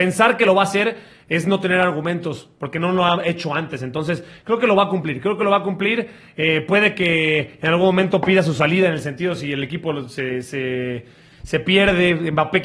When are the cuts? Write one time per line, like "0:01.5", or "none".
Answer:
none